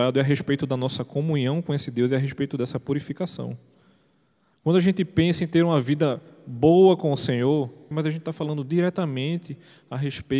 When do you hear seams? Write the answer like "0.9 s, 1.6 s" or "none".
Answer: 4.5 s, 7.9 s